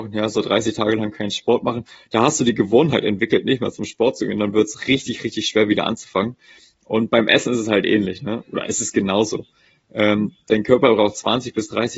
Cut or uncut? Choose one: uncut